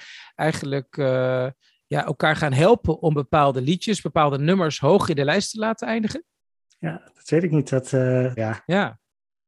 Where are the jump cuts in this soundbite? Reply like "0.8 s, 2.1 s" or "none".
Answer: 8.4 s